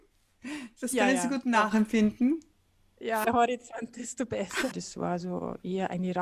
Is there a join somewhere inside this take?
yes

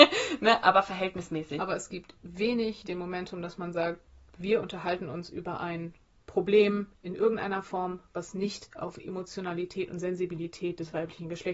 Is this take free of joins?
no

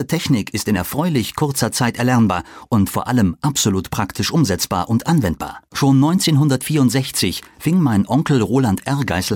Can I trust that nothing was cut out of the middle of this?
no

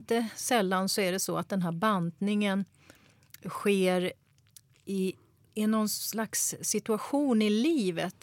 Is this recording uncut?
no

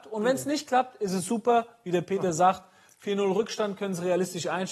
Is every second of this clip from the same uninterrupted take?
yes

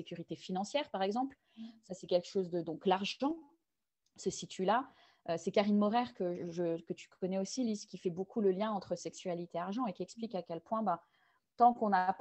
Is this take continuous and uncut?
yes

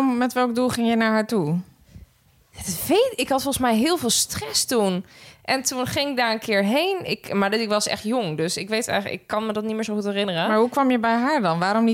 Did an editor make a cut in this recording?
no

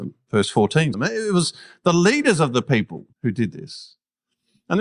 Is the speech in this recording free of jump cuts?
no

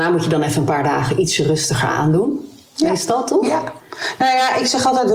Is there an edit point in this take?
no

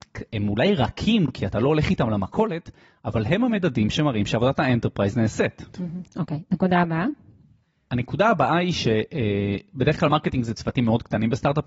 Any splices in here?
no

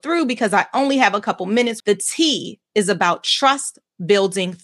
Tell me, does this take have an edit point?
yes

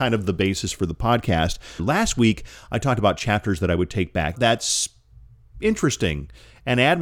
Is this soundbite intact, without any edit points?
no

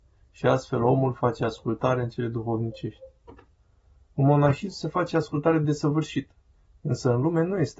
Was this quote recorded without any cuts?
yes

